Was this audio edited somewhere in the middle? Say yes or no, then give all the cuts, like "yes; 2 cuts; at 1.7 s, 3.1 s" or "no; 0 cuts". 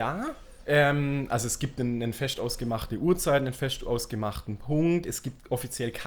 no; 0 cuts